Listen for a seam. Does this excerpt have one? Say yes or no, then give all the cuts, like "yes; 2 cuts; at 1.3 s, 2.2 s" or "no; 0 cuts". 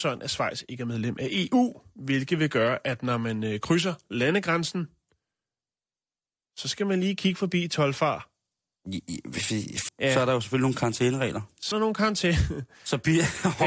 yes; 2 cuts; at 9.9 s, 11.7 s